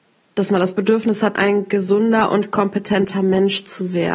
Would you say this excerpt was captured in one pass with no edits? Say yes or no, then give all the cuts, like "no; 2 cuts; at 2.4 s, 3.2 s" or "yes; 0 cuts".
no; 1 cut; at 1.3 s